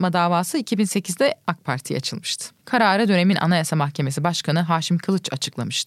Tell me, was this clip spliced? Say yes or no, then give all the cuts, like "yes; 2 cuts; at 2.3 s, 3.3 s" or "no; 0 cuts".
yes; 1 cut; at 2.6 s